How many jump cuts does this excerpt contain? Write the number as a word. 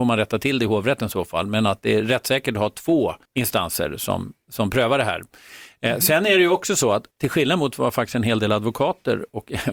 two